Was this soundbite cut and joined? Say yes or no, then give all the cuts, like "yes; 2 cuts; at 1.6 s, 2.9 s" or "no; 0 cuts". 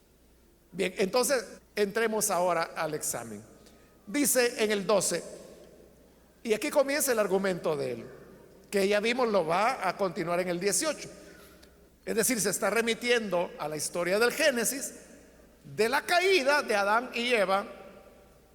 yes; 2 cuts; at 1.6 s, 11.9 s